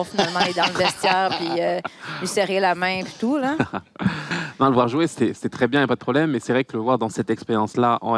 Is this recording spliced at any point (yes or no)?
yes